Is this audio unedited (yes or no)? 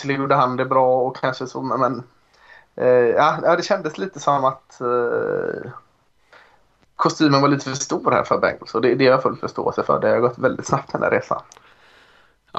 yes